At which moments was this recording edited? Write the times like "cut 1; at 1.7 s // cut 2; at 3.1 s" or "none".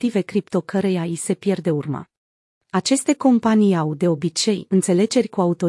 cut 1; at 2.6 s